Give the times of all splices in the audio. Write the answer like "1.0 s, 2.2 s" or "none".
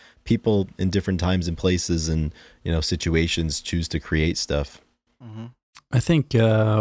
none

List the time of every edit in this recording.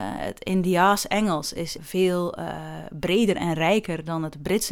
1.8 s

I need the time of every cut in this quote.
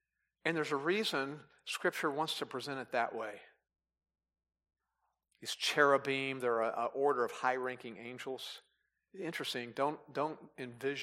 5.3 s, 9.1 s

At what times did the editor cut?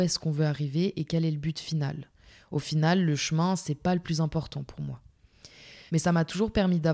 5.9 s

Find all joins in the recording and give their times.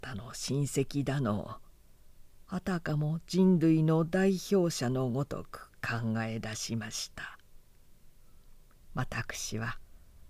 8.9 s

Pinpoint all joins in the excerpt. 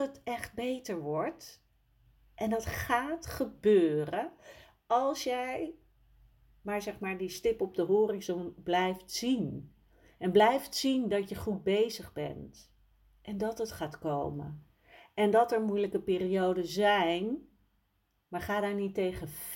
none

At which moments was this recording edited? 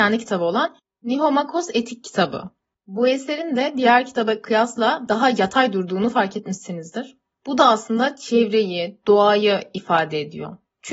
none

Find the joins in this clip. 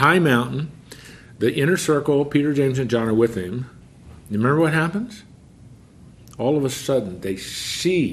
none

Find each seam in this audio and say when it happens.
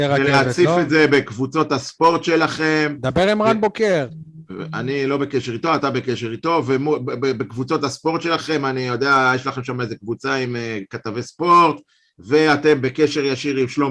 none

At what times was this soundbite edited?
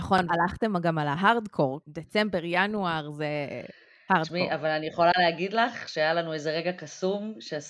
none

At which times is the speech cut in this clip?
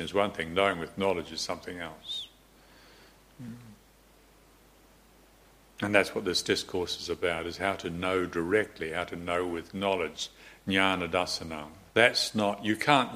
11.9 s

